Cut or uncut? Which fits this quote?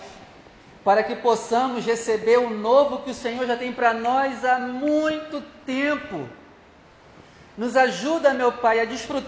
uncut